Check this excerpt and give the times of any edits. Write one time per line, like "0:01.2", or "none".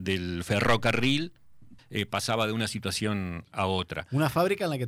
0:01.8